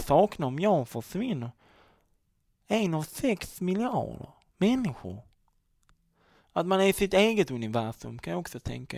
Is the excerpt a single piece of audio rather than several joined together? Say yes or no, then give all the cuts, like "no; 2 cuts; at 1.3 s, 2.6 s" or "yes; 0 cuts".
yes; 0 cuts